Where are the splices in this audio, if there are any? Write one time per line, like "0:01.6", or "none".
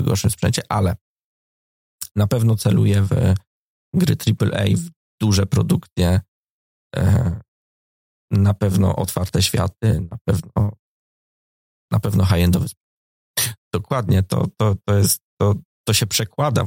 0:13.6